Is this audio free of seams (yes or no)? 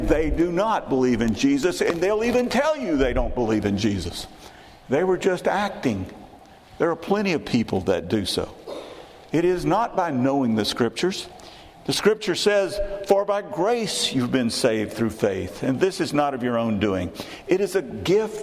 yes